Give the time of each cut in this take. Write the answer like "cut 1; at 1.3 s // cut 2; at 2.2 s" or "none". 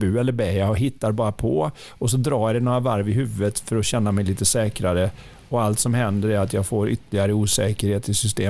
none

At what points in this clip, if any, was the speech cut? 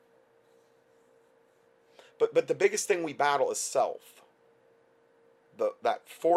none

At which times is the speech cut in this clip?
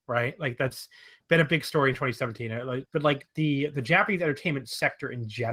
cut 1; at 2.9 s

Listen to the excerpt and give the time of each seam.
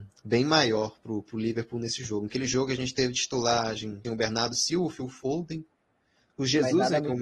cut 1; at 2.3 s // cut 2; at 4.0 s

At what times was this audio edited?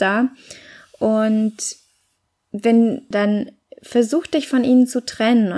cut 1; at 3.1 s

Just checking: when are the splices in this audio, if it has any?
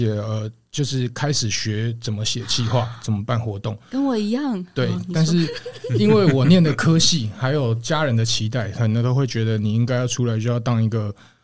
none

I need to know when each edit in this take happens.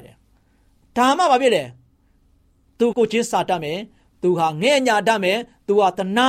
cut 1; at 2.9 s

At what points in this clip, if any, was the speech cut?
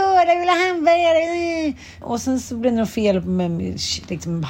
cut 1; at 2.0 s

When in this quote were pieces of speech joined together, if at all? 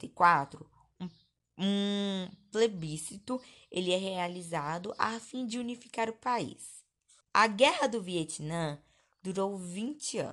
cut 1; at 7.2 s

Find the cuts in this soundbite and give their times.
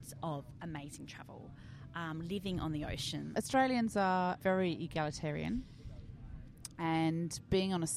cut 1; at 3.3 s // cut 2; at 4.4 s

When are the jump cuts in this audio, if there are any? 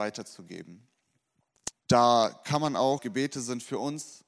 cut 1; at 1.7 s // cut 2; at 3.0 s

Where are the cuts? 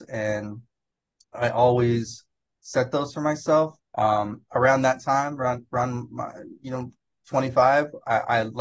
cut 1; at 3.8 s

